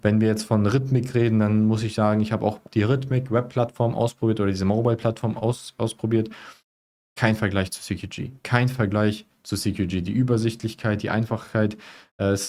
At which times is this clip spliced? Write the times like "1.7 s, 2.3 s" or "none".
none